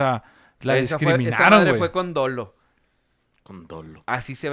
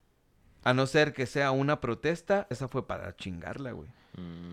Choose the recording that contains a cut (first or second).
second